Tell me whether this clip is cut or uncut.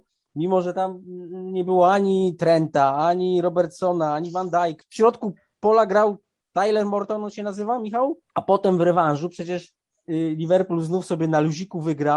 cut